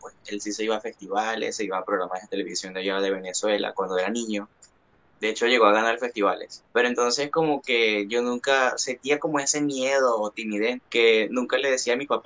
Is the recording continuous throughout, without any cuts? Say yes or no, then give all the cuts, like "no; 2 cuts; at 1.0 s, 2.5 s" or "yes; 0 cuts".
no; 2 cuts; at 6.7 s, 10.8 s